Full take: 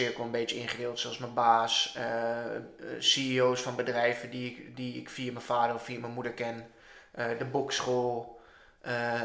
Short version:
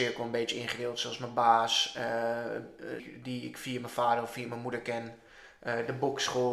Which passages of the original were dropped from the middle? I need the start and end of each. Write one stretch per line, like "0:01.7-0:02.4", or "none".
0:03.0-0:04.5